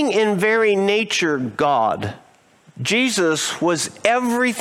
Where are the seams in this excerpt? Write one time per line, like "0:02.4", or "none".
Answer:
0:02.6